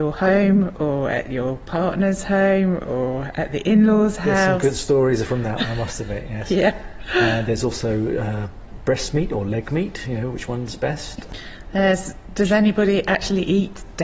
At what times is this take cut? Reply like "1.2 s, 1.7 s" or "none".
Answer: none